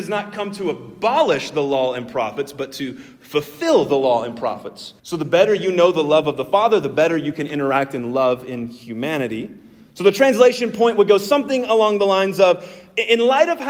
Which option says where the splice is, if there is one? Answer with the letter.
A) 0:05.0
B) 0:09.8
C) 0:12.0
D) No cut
A